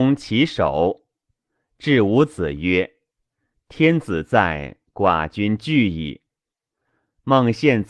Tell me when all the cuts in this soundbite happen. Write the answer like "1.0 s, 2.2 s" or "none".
4.9 s